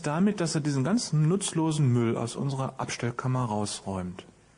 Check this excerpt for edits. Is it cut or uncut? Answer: uncut